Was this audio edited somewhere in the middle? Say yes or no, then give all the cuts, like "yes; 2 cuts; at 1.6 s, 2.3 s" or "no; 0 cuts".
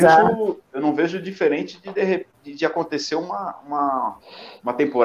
no; 0 cuts